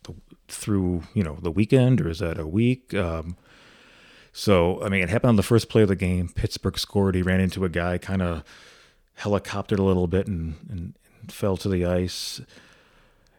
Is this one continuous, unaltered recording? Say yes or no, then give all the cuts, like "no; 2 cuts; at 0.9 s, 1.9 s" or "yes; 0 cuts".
yes; 0 cuts